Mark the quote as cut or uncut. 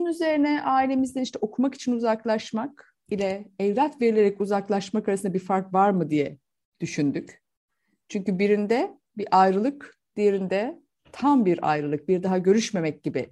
uncut